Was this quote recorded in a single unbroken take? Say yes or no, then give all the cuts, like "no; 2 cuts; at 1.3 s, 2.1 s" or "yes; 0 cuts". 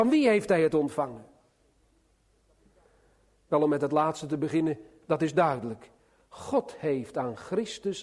yes; 0 cuts